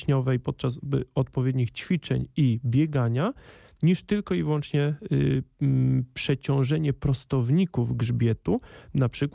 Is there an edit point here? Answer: no; 0 cuts

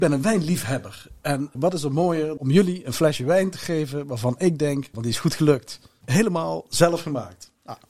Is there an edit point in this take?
yes; 1 cut; at 4.9 s

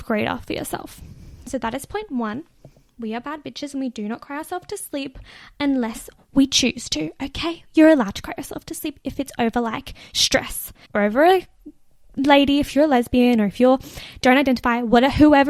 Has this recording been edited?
yes; 1 cut; at 10.9 s

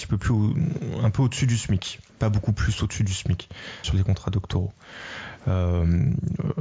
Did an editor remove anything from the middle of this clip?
yes; 2 cuts; at 2.1 s, 3.8 s

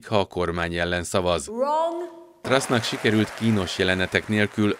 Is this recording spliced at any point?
yes; 1 cut; at 2.4 s

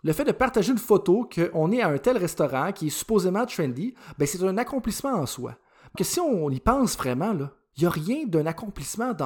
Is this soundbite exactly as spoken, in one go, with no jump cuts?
no; 1 cut; at 6.0 s

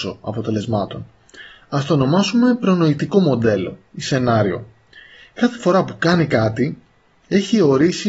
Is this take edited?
no; 0 cuts

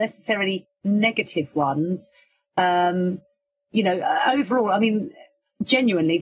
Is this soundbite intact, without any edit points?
yes; 0 cuts

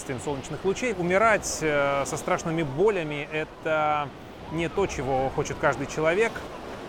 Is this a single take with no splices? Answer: no; 1 cut; at 0.9 s

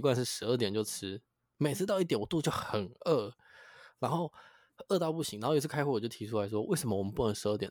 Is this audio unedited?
yes; 0 cuts

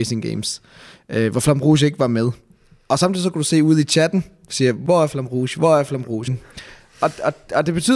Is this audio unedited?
no; 1 cut; at 6.3 s

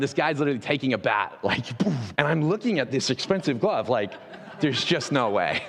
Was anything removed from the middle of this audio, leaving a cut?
yes; 1 cut; at 2.2 s

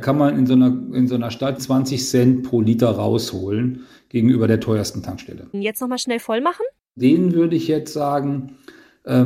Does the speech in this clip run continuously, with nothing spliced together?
no; 1 cut; at 5.5 s

